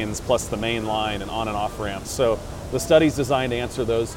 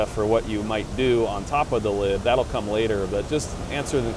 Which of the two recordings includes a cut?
first; 1 cut; at 2.0 s

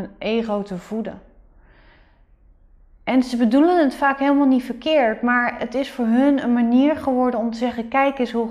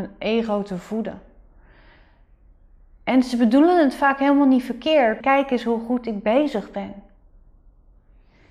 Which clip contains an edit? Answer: second; 1 cut; at 5.2 s

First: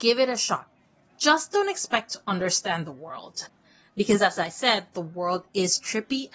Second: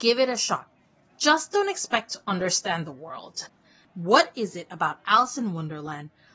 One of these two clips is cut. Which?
second; 1 cut; at 3.8 s

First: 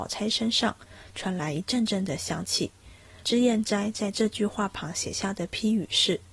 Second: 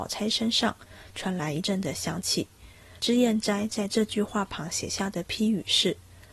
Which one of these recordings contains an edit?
second; 1 cut; at 1.6 s

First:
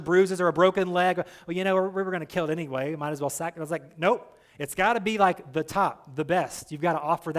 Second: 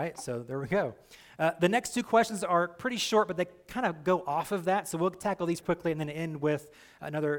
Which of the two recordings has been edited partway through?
second; 1 cut; at 5.6 s

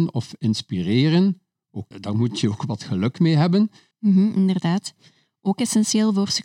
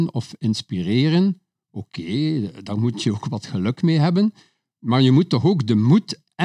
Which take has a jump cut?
first; 2 cuts; at 1.9 s, 3.9 s

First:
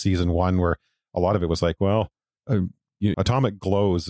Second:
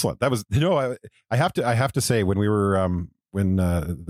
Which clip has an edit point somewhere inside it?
first; 1 cut; at 3.1 s

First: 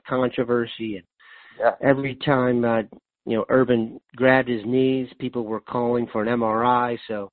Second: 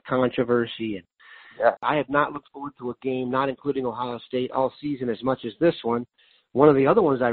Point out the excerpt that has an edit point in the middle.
second; 1 cut; at 1.8 s

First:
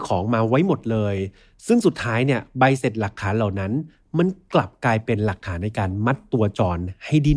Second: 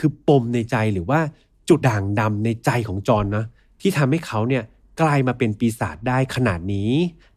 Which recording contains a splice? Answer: second; 1 cut; at 1.8 s

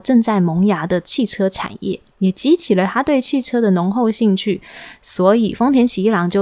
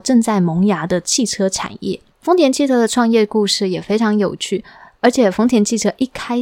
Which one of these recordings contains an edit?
second; 1 cut; at 2.1 s

